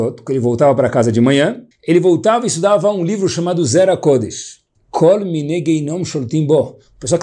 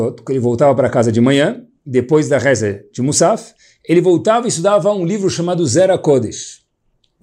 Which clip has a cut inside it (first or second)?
first